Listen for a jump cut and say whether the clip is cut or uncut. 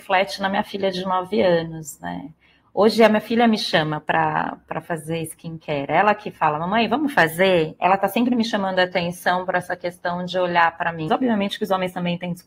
cut